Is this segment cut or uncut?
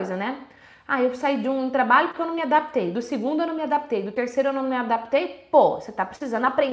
uncut